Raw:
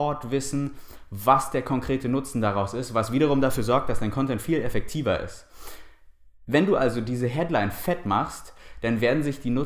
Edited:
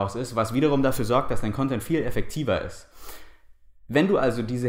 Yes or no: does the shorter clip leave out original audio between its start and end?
no